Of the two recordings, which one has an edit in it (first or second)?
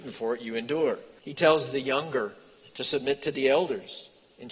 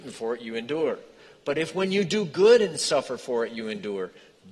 first